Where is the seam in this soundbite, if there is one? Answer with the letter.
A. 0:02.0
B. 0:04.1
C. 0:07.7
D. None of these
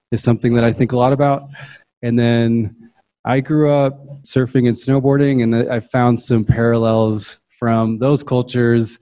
D